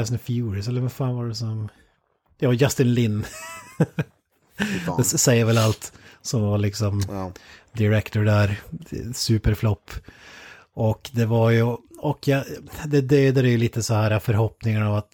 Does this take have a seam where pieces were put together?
no; 0 cuts

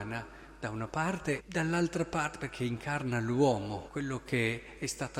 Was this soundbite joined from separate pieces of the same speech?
yes; 2 cuts; at 1.4 s, 3.9 s

